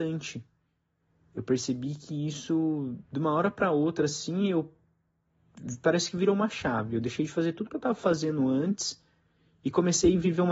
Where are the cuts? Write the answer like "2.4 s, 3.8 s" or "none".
none